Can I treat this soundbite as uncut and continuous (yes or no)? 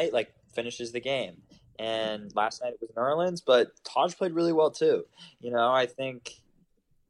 yes